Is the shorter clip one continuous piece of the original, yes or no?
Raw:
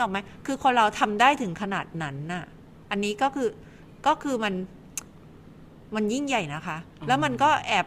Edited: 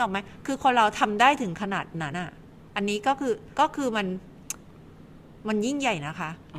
no